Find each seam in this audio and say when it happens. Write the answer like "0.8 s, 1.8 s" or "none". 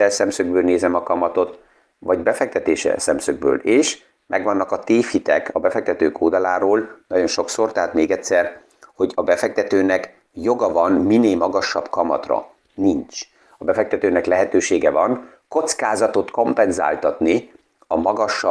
none